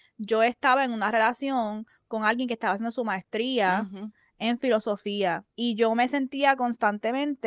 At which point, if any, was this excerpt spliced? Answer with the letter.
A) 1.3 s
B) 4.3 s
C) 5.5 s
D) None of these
C